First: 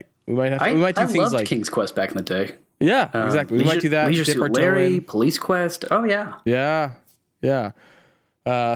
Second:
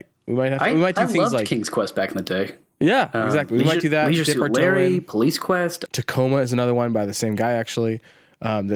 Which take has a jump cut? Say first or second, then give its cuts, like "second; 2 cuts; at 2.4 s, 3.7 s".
second; 1 cut; at 5.9 s